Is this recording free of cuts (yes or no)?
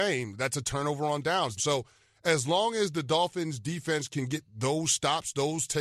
no